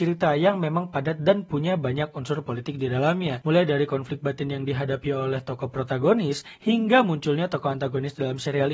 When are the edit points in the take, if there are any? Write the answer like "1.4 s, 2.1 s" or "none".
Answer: none